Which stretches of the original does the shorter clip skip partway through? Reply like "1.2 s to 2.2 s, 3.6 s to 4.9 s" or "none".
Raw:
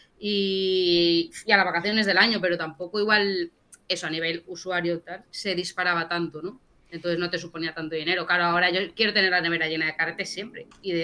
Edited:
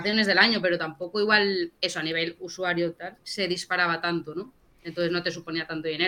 3.6 s to 3.8 s